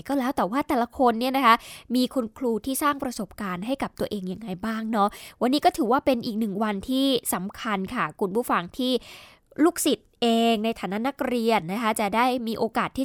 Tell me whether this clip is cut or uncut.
uncut